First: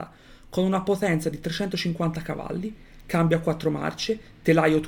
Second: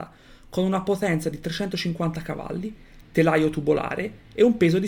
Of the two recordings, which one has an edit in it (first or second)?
second